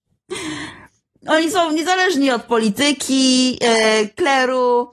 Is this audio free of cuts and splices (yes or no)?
yes